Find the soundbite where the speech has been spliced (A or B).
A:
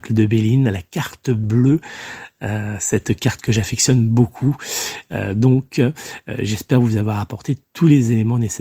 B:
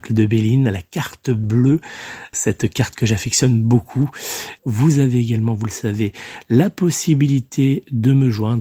B